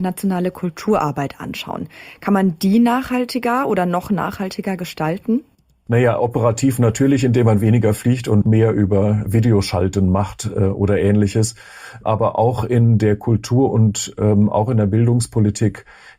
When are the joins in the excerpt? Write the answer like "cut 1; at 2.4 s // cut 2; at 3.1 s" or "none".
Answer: none

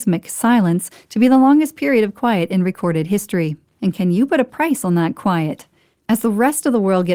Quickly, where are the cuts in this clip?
cut 1; at 3.7 s // cut 2; at 6.0 s

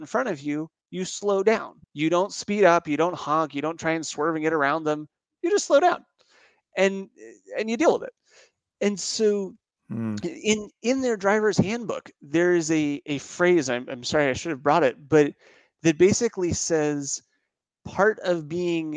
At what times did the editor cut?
cut 1; at 1.8 s

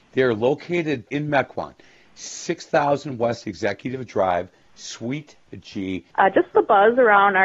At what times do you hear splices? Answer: cut 1; at 1.1 s // cut 2; at 6.1 s

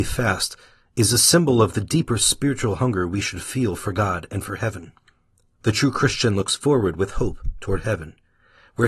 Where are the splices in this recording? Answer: cut 1; at 5.5 s

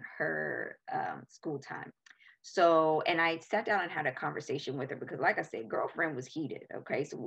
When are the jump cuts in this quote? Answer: none

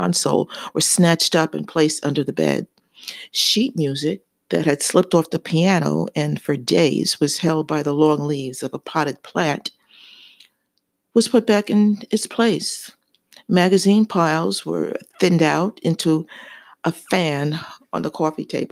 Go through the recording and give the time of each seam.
none

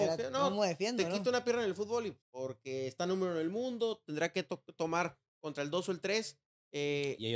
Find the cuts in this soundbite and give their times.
cut 1; at 2.2 s

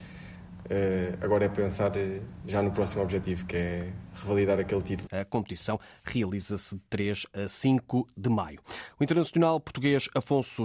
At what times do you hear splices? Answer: cut 1; at 5.1 s

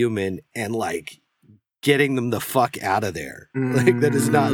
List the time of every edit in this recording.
none

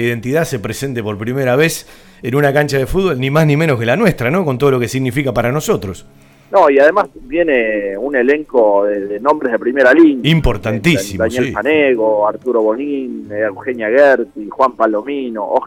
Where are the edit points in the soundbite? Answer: none

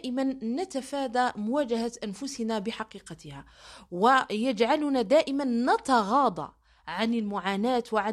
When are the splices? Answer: none

